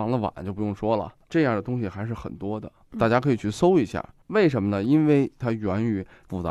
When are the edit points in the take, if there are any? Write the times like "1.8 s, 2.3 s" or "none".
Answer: none